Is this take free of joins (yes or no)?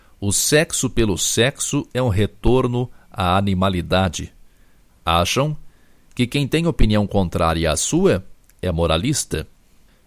no